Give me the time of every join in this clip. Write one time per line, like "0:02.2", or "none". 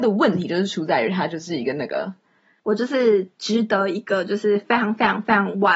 0:02.6